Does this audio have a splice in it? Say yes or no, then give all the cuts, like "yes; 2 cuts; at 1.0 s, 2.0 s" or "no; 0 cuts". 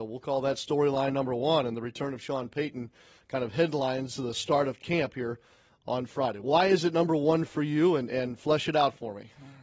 no; 0 cuts